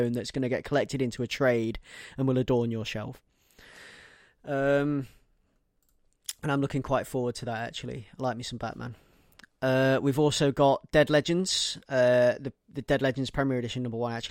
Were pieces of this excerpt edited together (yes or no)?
no